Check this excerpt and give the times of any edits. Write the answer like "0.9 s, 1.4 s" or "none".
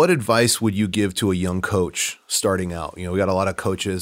none